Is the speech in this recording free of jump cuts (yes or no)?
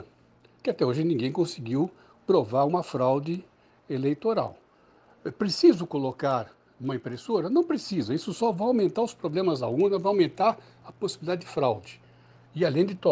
yes